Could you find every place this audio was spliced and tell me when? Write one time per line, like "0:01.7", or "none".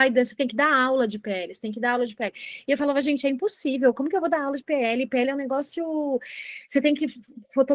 none